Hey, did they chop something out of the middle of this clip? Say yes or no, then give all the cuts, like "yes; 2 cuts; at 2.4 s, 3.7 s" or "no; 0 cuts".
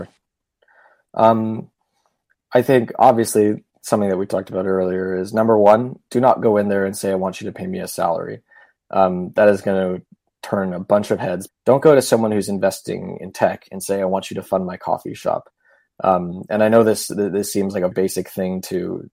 yes; 2 cuts; at 11.5 s, 17.9 s